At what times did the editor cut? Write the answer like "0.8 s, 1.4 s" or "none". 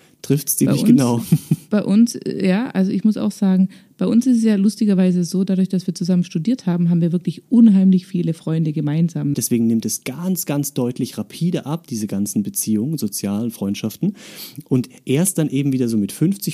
9.3 s